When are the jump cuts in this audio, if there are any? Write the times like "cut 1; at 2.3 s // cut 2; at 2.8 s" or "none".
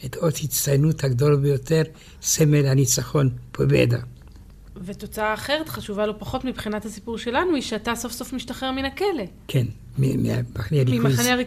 none